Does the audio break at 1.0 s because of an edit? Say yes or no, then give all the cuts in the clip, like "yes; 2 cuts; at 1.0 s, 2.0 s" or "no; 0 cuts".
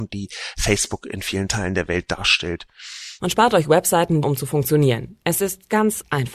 no; 2 cuts; at 3.2 s, 4.2 s